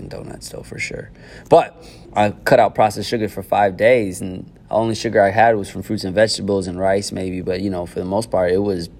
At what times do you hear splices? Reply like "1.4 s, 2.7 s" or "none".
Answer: 2.1 s